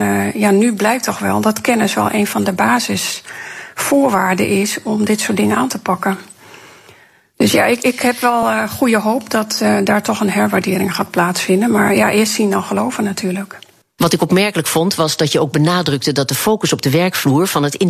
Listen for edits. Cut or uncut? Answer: uncut